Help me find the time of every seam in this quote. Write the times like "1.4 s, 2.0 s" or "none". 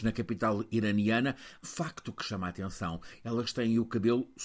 1.6 s

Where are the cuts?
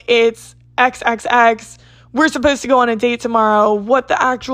none

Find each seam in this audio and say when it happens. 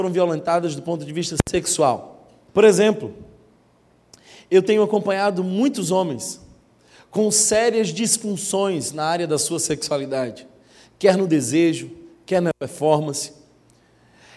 2.5 s

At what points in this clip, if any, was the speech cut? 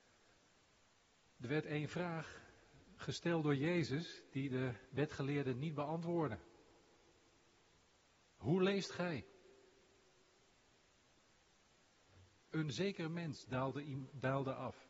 12.4 s

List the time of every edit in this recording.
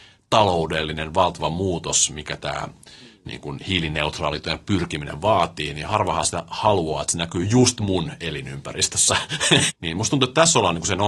9.7 s

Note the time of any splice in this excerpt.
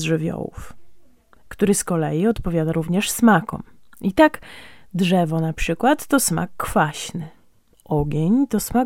none

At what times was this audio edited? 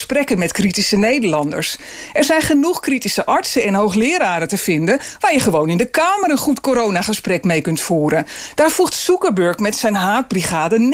none

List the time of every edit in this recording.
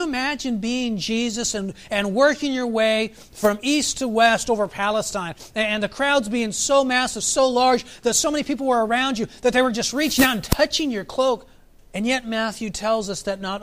11.8 s

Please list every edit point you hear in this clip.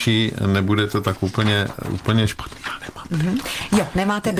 none

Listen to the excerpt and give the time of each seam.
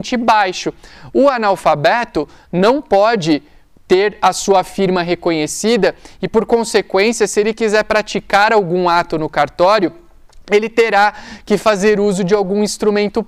none

